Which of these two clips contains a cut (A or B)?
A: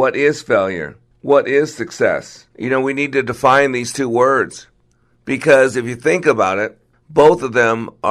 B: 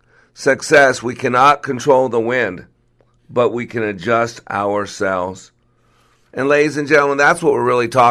A